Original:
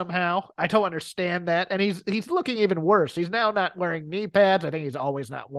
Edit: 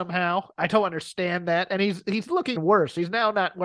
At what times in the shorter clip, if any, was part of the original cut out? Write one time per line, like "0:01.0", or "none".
0:02.5